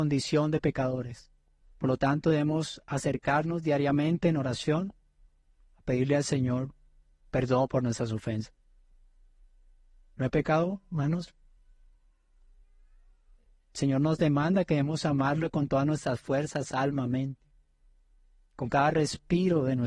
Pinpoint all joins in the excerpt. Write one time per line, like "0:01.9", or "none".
0:01.6